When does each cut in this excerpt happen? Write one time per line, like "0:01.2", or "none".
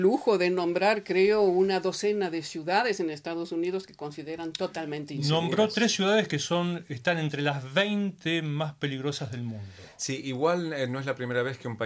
none